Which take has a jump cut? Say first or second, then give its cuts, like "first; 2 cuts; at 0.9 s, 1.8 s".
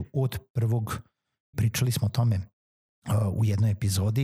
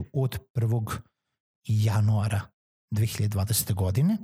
first; 1 cut; at 1.5 s